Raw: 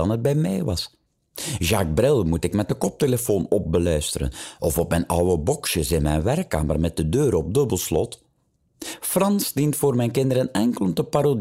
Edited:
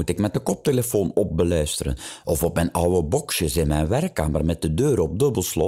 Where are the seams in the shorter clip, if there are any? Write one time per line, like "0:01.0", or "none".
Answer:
none

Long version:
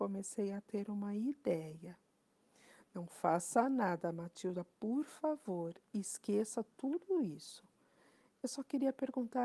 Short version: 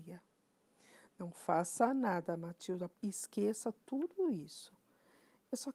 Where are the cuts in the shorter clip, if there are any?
0:02.9

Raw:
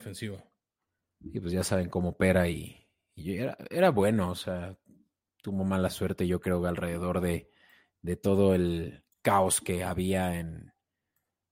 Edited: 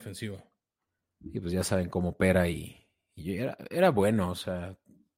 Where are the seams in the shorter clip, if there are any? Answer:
none

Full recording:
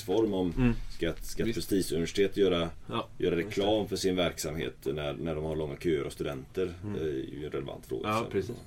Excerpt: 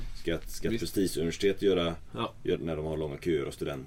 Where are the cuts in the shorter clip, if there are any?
0:02.6

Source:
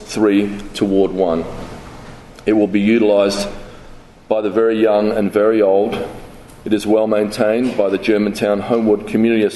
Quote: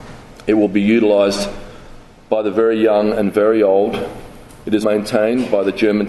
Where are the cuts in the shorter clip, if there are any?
0:04.8

